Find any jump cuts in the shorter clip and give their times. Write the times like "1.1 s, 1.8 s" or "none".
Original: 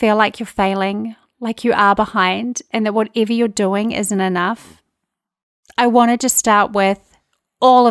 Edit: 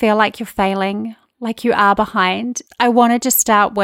2.7 s